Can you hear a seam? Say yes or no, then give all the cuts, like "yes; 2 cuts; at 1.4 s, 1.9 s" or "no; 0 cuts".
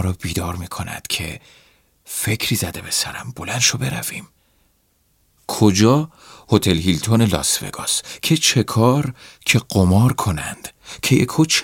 no; 0 cuts